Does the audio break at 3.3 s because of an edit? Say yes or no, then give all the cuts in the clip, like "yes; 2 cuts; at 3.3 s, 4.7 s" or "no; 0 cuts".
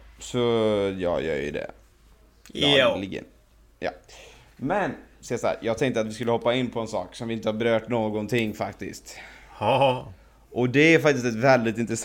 no; 0 cuts